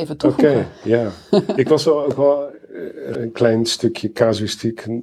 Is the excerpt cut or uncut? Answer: cut